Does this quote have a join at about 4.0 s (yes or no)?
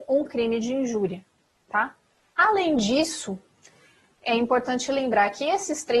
no